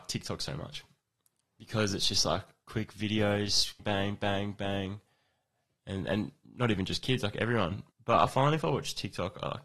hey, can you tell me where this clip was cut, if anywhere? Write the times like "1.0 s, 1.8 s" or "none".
3.8 s, 7.9 s